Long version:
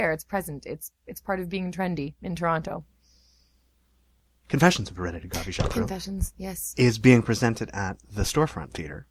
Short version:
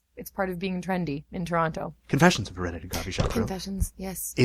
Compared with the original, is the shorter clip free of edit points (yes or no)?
no